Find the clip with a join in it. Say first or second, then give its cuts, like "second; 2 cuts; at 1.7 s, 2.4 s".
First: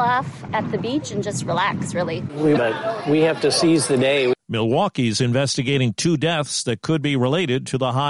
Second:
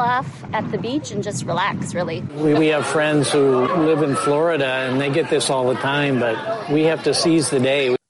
first; 1 cut; at 2.6 s